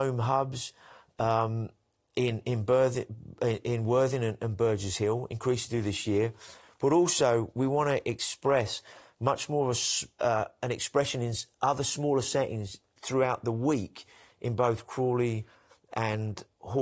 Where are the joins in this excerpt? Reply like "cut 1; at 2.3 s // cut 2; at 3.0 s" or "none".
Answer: none